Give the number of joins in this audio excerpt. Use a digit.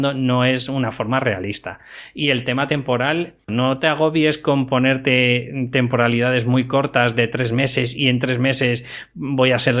1